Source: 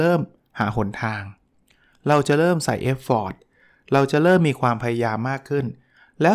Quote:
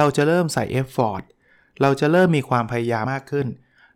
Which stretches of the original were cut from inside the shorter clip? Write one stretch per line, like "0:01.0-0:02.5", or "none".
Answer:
0:05.2-0:05.2